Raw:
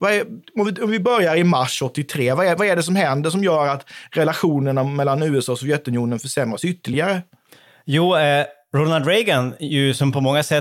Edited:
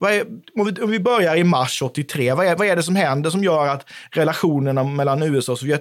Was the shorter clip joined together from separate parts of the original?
no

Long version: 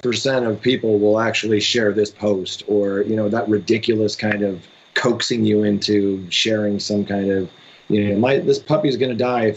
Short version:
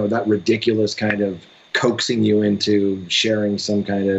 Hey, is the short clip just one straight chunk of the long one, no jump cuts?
yes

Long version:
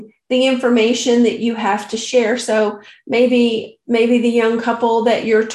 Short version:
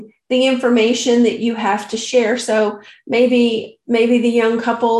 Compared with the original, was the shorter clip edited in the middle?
no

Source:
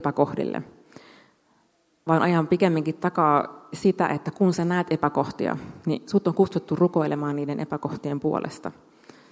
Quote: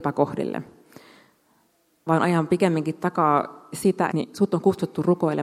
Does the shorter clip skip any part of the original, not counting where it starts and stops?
yes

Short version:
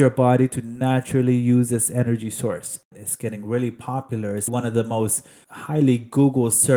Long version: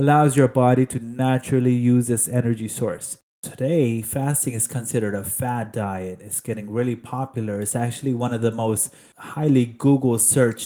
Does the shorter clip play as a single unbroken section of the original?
no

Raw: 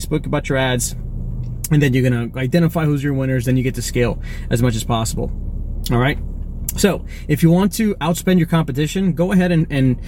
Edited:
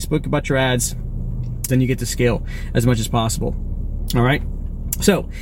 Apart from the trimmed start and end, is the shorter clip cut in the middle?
yes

